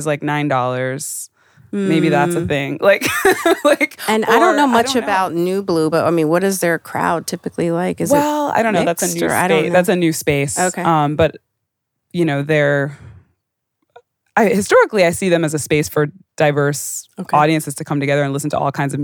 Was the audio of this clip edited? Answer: no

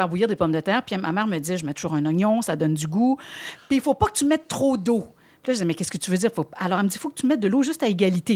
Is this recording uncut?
yes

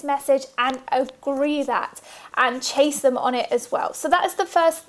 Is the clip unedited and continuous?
yes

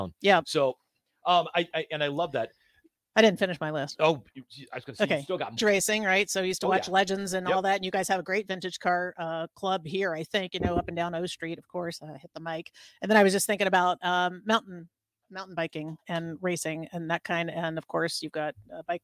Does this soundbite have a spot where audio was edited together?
yes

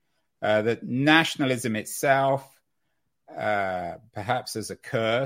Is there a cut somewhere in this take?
no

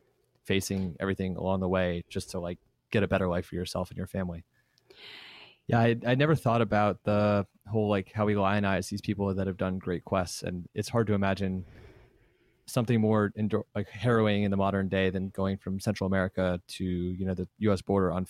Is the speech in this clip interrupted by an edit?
yes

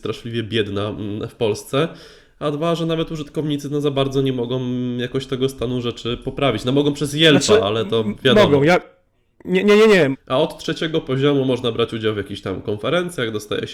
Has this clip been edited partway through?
yes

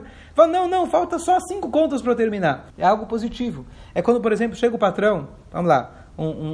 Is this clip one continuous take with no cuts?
no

